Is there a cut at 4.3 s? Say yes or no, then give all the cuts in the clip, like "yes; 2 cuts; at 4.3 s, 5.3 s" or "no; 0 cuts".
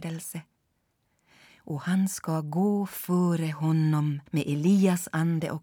yes; 2 cuts; at 1.5 s, 4.3 s